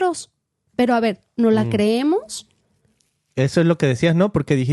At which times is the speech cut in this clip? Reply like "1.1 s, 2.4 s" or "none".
none